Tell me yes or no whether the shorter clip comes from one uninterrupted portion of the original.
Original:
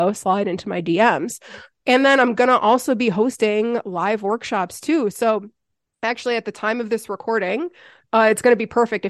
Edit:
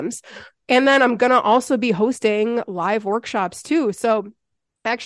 yes